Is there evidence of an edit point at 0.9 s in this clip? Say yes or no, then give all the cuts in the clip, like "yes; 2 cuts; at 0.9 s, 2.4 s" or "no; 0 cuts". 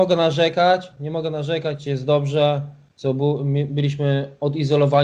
no; 1 cut; at 2.9 s